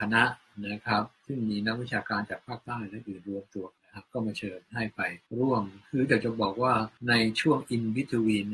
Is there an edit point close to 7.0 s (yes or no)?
yes